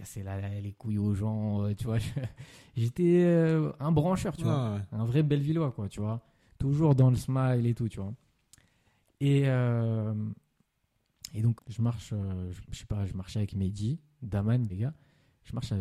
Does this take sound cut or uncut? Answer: cut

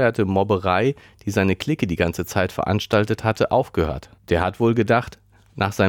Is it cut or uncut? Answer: cut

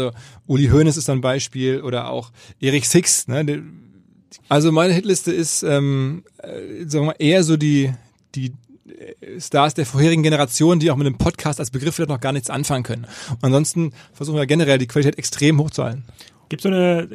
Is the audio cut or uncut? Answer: cut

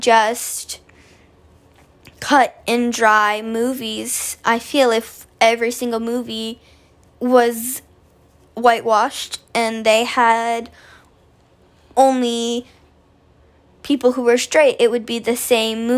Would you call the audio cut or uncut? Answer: uncut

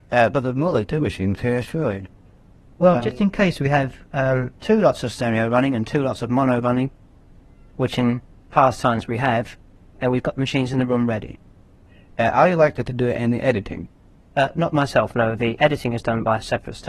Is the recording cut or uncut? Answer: uncut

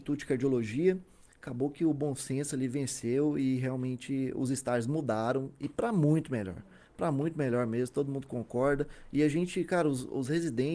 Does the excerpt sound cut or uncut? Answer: uncut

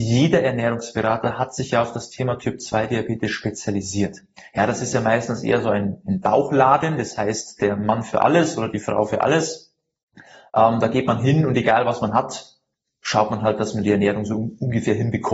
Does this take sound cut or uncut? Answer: uncut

